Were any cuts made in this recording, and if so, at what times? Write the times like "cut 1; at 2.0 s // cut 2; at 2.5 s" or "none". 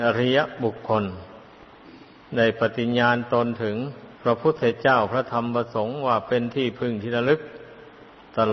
cut 1; at 4.1 s